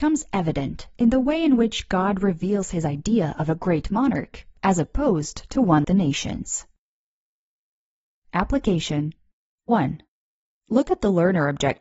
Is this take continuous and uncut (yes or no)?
no